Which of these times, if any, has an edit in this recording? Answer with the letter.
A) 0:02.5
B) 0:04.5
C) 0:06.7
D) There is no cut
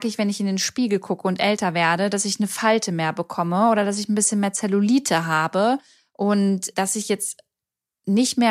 C